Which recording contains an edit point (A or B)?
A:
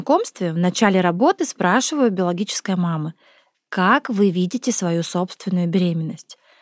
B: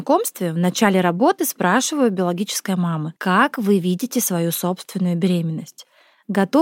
B